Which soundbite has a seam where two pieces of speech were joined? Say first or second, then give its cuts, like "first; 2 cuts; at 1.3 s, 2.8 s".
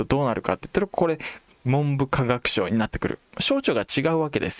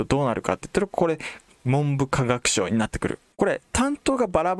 second; 1 cut; at 3.3 s